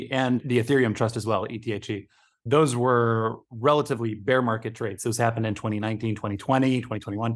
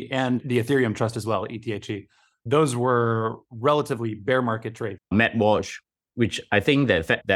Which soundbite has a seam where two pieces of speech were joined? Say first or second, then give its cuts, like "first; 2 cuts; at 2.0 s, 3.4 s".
second; 1 cut; at 5.0 s